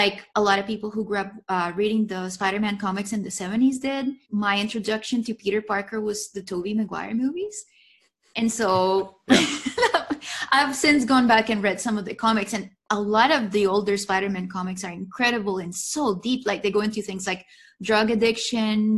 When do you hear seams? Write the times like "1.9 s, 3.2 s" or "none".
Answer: 4.2 s